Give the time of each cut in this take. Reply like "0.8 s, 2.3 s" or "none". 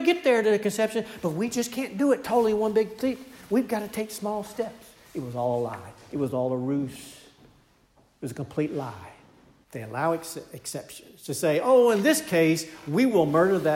9.6 s